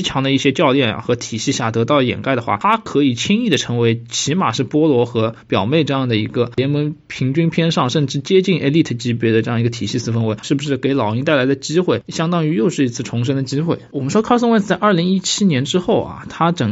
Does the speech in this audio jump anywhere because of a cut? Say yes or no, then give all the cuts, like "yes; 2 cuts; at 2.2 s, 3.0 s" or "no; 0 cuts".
yes; 1 cut; at 10.4 s